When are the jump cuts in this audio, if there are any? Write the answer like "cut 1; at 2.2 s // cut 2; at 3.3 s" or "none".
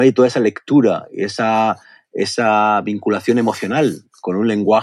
none